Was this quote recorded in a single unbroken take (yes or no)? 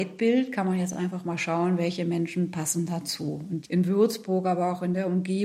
yes